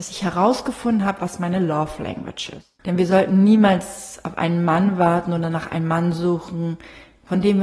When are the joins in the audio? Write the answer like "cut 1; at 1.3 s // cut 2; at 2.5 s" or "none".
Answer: cut 1; at 2.8 s